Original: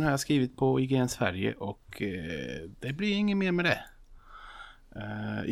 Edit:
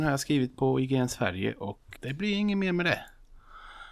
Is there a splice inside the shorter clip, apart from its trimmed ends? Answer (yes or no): yes